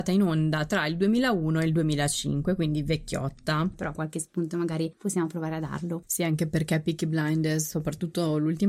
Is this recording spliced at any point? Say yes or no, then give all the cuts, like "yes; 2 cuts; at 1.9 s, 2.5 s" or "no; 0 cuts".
yes; 2 cuts; at 3.7 s, 6.1 s